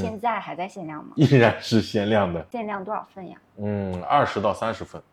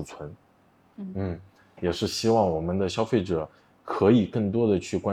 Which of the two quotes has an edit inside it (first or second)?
second